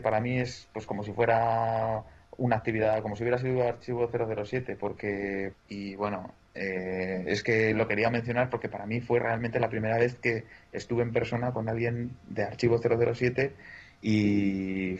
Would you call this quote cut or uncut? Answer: cut